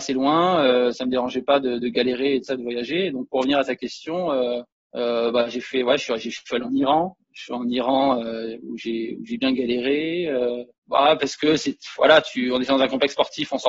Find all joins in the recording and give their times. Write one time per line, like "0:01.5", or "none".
none